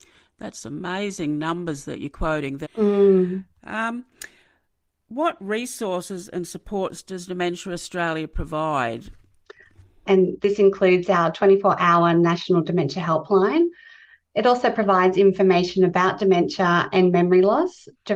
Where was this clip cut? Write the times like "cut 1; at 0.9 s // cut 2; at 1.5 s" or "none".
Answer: cut 1; at 2.6 s // cut 2; at 10.1 s